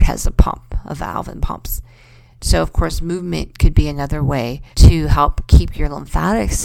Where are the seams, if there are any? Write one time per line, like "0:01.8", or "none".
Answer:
0:02.4
0:04.7